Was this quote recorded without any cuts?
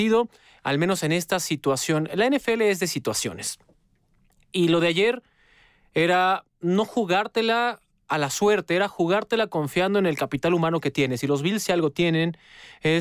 yes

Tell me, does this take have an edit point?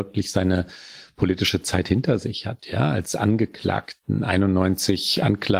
no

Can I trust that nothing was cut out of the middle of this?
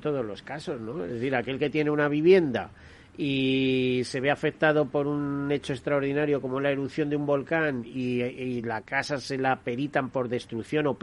yes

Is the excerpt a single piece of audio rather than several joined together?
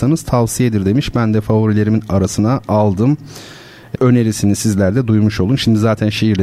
no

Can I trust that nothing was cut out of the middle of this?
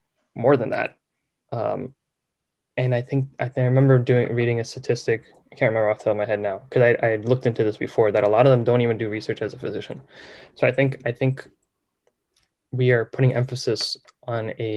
yes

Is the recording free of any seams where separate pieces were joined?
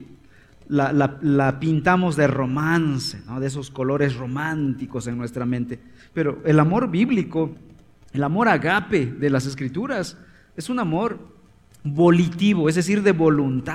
yes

